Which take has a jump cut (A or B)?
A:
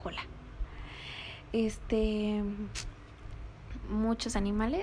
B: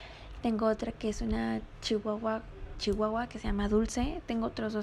B